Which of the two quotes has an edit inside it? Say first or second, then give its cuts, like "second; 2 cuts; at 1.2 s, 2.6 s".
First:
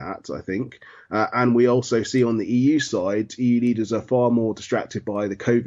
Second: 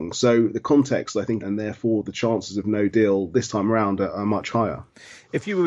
second; 1 cut; at 1.4 s